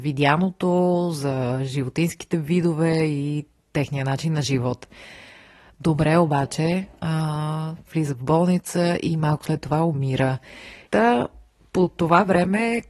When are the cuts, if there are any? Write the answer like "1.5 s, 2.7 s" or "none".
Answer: 7.9 s, 10.9 s